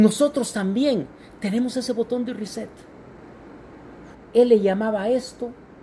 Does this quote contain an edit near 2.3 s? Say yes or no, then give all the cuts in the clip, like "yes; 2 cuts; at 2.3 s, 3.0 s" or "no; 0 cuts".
no; 1 cut; at 4.1 s